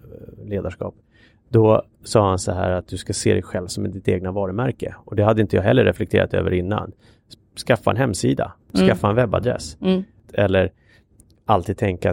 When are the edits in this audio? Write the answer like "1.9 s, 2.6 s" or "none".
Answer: 10.2 s